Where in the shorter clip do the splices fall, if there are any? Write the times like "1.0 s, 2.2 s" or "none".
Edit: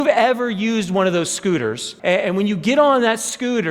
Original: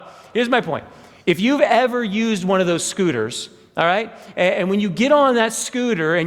2.0 s